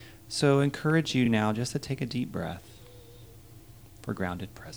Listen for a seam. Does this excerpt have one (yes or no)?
no